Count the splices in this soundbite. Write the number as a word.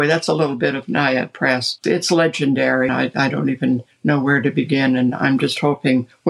two